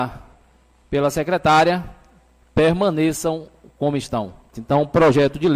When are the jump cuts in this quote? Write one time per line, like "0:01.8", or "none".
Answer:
0:04.5